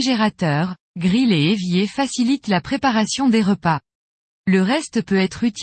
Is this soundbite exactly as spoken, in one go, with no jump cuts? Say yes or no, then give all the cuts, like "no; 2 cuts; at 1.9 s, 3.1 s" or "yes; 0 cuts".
yes; 0 cuts